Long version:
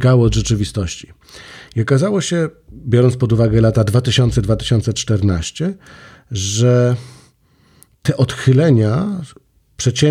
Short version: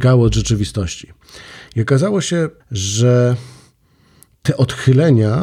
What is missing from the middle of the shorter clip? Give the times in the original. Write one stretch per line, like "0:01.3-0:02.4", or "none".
0:02.6-0:06.2

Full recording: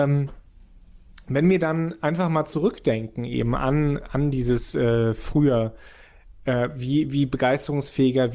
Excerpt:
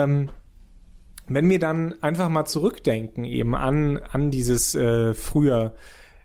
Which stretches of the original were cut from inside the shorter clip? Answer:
none

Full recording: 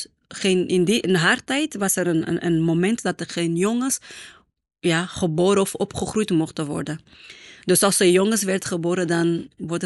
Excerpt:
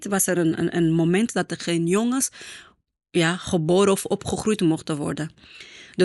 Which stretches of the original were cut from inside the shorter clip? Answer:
none

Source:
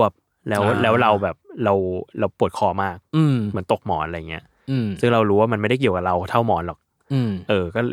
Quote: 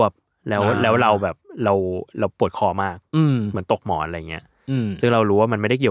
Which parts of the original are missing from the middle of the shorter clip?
none

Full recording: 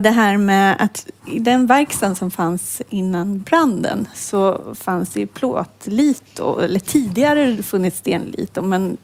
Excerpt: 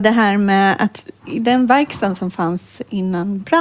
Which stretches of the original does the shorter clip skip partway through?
none

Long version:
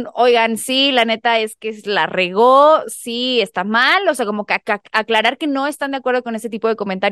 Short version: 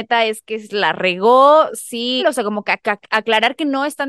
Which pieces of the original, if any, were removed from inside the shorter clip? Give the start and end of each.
0:03.3-0:04.0

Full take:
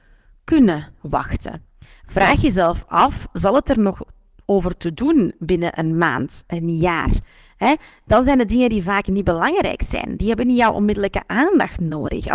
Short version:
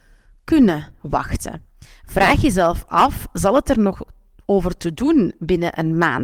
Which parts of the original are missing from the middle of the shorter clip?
none

